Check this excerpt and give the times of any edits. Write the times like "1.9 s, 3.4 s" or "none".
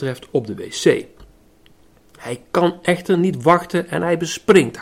none